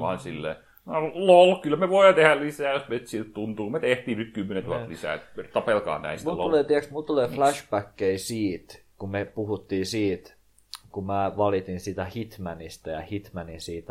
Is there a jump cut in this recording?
no; 0 cuts

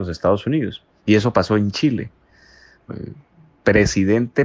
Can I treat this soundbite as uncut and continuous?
no; 2 cuts; at 1.0 s, 2.7 s

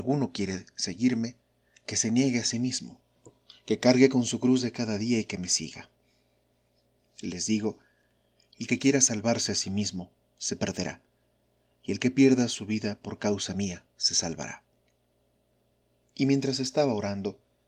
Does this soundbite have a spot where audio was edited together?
yes; 1 cut; at 16.0 s

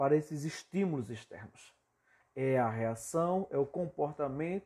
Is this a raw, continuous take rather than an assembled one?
no; 1 cut; at 2.2 s

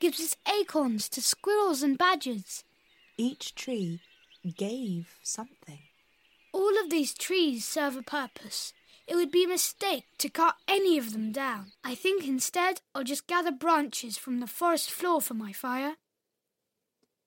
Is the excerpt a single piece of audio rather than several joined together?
no; 1 cut; at 11.7 s

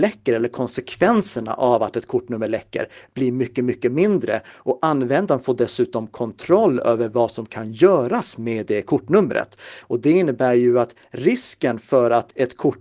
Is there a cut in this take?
yes; 1 cut; at 9.8 s

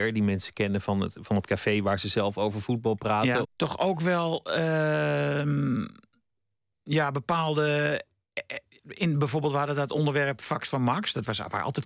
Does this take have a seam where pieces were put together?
yes; 1 cut; at 3.4 s

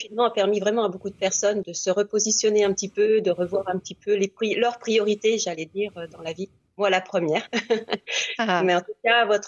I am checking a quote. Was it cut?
yes; 1 cut; at 1.6 s

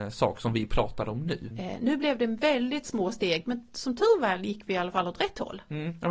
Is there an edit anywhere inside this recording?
yes; 1 cut; at 1.5 s

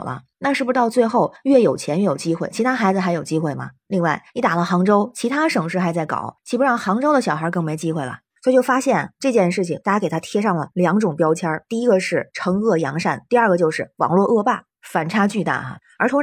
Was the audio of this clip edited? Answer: no; 0 cuts

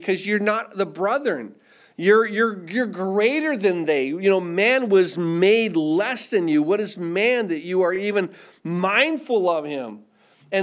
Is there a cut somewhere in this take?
no; 0 cuts

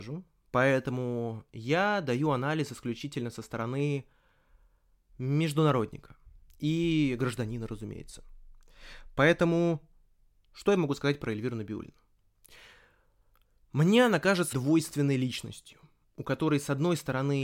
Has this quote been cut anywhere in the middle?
yes; 1 cut; at 14.5 s

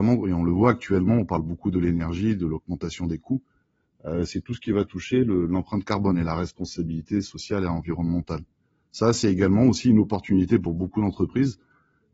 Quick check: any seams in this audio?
no; 0 cuts

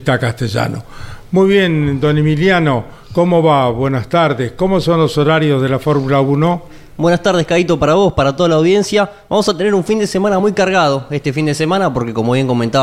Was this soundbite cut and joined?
no; 0 cuts

